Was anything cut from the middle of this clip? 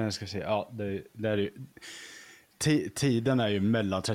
no; 0 cuts

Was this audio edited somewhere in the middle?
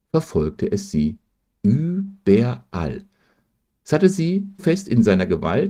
yes; 1 cut; at 4.6 s

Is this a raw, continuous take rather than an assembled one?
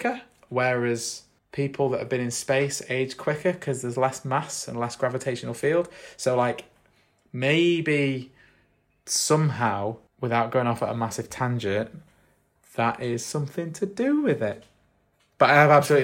yes; 0 cuts

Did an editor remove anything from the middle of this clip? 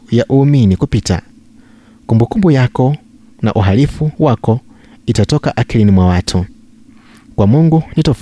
no; 0 cuts

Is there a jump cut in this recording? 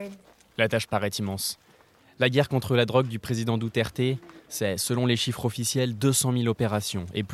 no; 0 cuts

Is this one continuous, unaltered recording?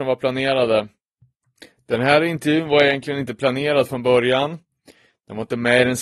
yes; 0 cuts

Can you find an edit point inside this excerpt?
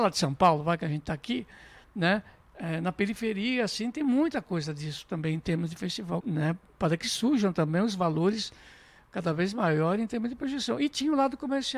yes; 1 cut; at 6.2 s

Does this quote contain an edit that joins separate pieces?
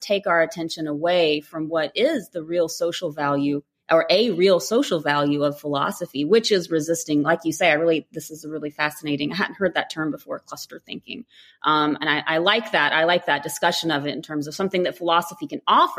no; 0 cuts

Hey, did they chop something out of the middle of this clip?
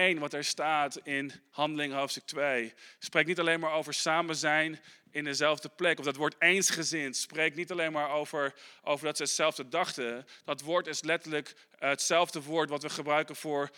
no; 0 cuts

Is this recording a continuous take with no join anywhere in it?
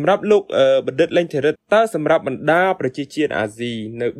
no; 1 cut; at 1.6 s

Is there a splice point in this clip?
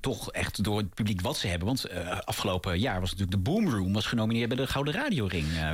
no; 0 cuts

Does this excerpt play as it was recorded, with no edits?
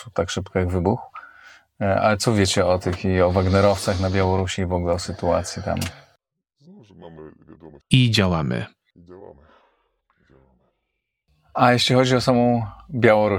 no; 1 cut; at 7.8 s

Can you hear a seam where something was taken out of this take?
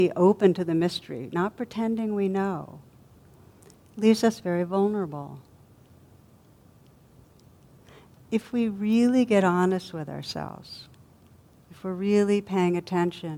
no; 0 cuts

